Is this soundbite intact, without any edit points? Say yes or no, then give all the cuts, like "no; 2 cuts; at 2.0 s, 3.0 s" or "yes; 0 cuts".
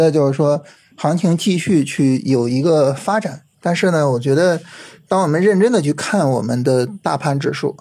no; 1 cut; at 3.5 s